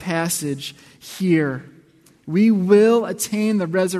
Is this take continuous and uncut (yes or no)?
yes